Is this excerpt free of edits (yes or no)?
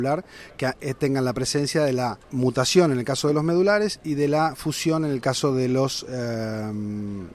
no